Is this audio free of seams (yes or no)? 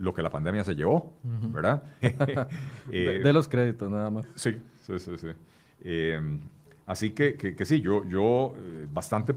no